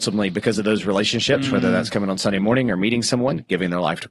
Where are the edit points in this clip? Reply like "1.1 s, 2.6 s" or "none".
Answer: none